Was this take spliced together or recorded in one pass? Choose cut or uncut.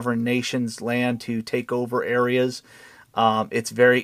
uncut